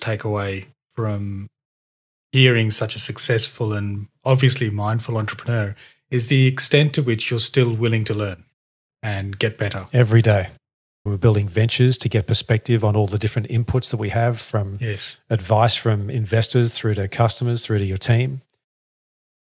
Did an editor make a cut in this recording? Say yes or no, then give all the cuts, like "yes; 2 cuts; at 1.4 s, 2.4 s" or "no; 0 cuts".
yes; 1 cut; at 11.1 s